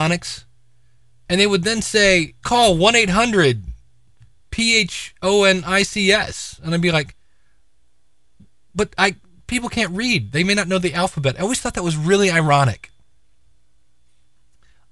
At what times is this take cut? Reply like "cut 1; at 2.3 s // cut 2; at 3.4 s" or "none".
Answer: cut 1; at 2.4 s